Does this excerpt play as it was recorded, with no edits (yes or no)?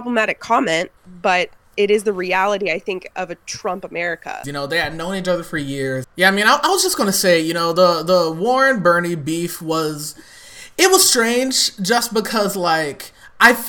no